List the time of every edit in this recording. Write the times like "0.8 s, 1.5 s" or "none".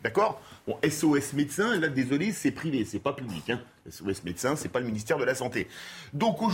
none